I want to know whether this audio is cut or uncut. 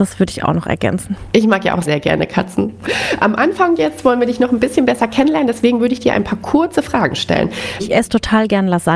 cut